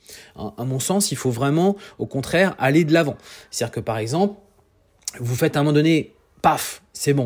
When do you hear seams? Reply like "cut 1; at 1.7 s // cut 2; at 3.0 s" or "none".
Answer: none